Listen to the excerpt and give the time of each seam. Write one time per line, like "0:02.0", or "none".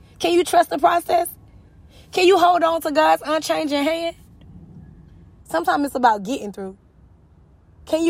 0:05.4